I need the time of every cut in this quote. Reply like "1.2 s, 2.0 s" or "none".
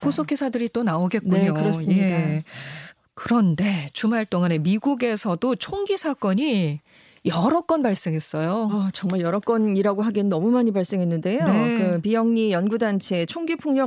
none